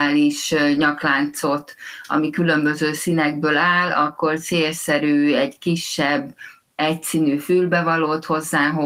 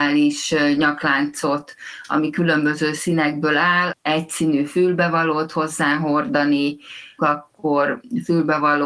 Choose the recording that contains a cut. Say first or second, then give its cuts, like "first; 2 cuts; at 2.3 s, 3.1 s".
second; 2 cuts; at 3.9 s, 7.2 s